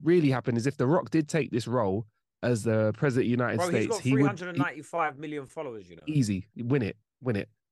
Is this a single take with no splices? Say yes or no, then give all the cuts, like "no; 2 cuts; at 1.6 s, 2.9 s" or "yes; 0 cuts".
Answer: yes; 0 cuts